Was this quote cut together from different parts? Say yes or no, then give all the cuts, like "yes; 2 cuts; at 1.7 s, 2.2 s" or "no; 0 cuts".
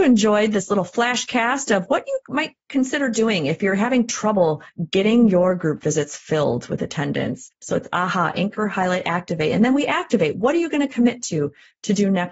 yes; 1 cut; at 7.5 s